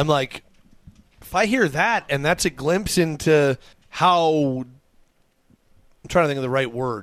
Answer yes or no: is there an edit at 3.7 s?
yes